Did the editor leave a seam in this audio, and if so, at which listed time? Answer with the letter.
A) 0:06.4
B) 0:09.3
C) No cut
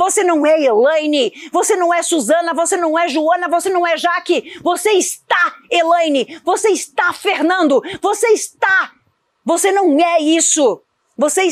C